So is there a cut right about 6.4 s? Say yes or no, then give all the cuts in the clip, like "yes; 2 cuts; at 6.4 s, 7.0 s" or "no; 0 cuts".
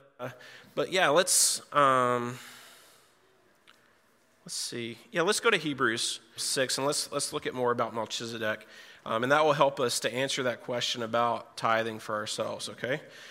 yes; 1 cut; at 6.4 s